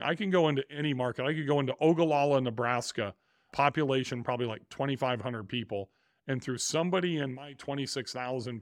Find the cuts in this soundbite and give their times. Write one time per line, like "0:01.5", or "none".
none